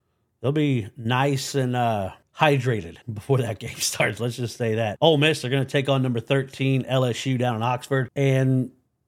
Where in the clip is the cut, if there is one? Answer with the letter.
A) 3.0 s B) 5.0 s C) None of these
A